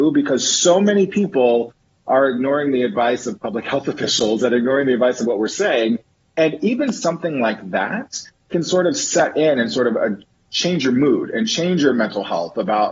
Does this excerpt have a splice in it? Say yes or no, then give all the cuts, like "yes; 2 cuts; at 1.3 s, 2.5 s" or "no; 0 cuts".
no; 0 cuts